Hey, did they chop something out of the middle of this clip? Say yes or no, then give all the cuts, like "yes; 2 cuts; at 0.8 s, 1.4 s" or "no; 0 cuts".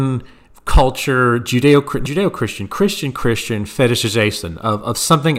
yes; 1 cut; at 2.1 s